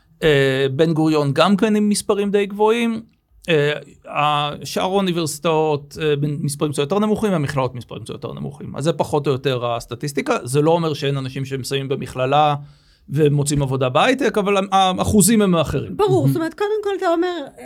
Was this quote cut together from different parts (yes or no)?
no